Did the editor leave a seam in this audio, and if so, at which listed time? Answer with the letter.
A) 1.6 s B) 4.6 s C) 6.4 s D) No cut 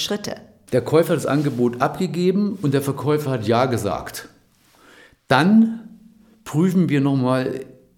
D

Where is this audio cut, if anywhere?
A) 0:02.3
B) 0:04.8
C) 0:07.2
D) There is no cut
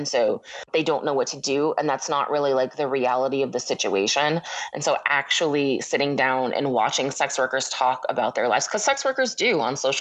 D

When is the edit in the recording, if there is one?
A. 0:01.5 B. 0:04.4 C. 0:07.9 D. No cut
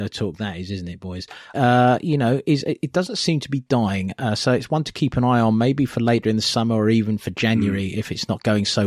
A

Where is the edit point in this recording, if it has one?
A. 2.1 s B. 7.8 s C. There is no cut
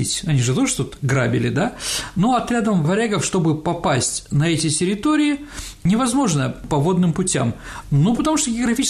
B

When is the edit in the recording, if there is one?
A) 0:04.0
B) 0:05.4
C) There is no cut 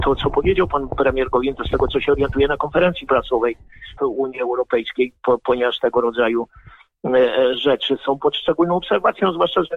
A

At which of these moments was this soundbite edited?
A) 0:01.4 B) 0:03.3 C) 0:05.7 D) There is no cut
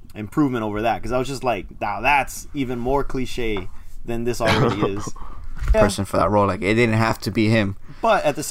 C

